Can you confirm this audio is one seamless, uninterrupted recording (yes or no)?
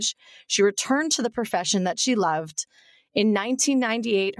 yes